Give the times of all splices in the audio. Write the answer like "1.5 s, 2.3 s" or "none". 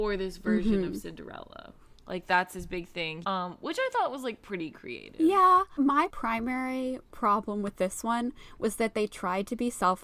3.2 s